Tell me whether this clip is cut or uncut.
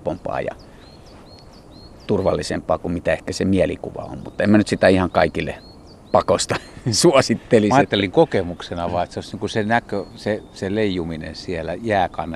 uncut